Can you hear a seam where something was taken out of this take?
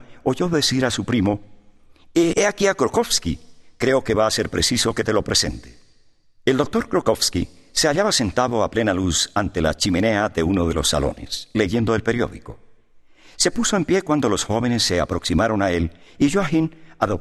yes; 1 cut; at 2.3 s

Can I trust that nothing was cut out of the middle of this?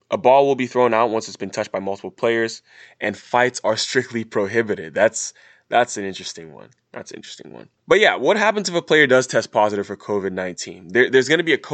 no; 1 cut; at 7.8 s

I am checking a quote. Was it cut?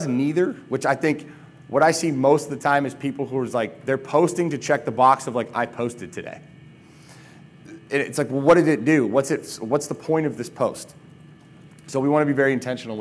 no; 0 cuts

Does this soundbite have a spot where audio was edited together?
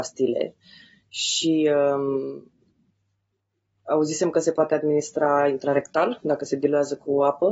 no; 0 cuts

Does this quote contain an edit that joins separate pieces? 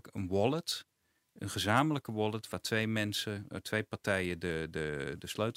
no; 0 cuts

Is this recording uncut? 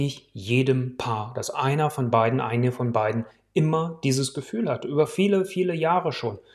yes; 0 cuts

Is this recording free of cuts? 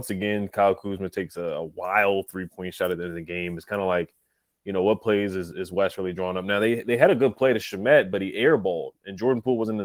yes; 0 cuts

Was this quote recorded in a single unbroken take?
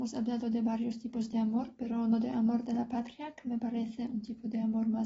yes; 0 cuts

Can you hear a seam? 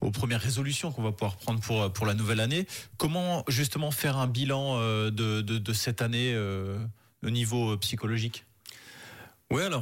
no; 0 cuts

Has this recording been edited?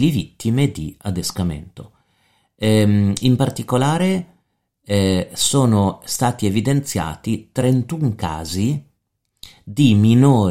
no; 0 cuts

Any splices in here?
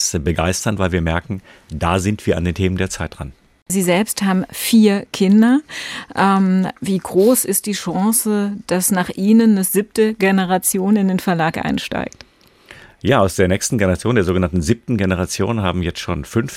yes; 1 cut; at 3.7 s

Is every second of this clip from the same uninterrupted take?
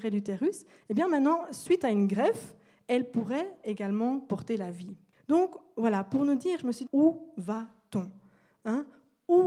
no; 2 cuts; at 5.1 s, 6.9 s

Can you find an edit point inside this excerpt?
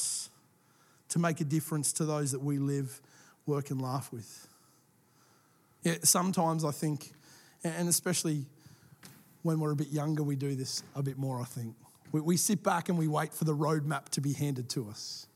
yes; 1 cut; at 5.8 s

